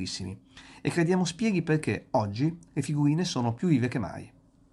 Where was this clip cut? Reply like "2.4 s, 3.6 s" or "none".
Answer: none